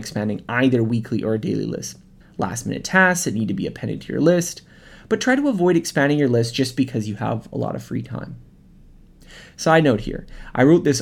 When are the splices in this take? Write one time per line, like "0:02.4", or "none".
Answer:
0:02.2